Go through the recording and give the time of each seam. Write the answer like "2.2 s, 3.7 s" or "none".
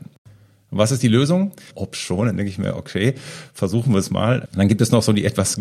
1.7 s, 4.5 s